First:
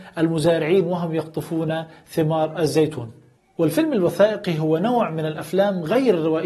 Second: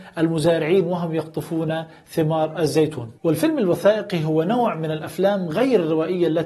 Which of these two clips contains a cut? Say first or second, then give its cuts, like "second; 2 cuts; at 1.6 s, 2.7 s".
second; 1 cut; at 3.2 s